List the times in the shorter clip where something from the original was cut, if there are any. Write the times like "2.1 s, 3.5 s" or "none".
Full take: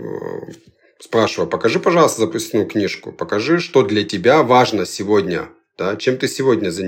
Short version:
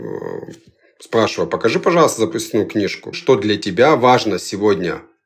3.1 s